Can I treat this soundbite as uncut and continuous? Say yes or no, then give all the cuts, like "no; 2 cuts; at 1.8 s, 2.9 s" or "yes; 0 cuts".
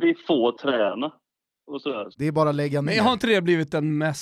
no; 1 cut; at 2.1 s